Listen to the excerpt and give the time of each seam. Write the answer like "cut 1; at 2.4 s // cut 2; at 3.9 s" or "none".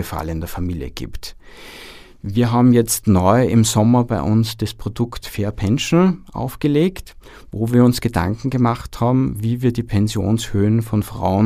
none